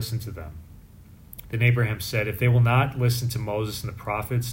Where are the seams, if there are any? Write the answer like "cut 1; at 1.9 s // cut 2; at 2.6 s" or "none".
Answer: cut 1; at 1.4 s

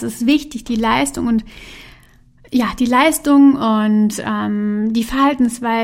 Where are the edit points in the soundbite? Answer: none

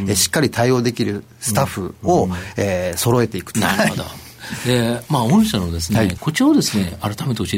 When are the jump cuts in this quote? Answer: cut 1; at 3.5 s // cut 2; at 6.2 s

